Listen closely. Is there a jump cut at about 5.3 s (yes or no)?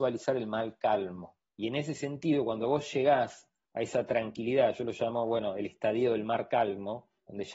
no